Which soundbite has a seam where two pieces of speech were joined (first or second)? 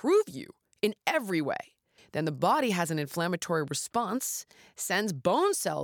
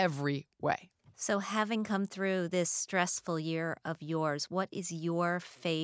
first